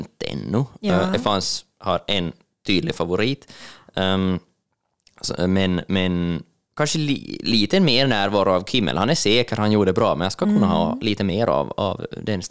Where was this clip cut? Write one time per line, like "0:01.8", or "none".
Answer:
none